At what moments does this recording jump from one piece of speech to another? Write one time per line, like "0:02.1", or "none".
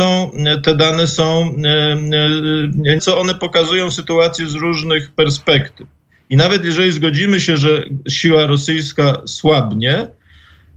0:03.0

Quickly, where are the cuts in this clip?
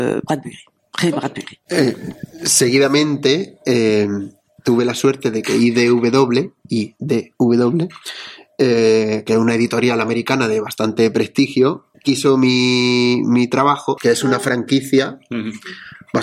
0:11.9
0:14.0

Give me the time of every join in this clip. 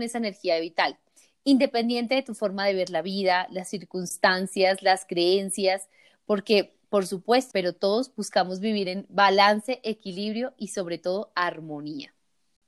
0:07.5

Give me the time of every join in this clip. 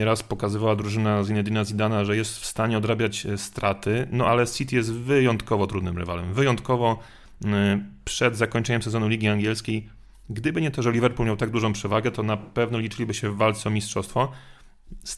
none

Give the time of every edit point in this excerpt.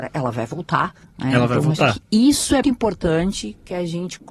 0:02.6

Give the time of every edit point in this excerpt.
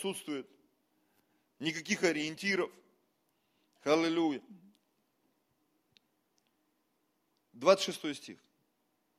none

